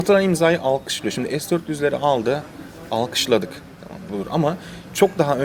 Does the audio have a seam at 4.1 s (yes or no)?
yes